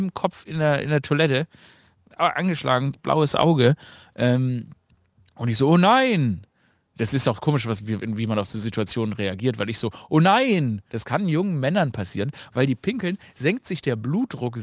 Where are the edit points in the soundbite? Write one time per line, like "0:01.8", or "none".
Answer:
0:10.9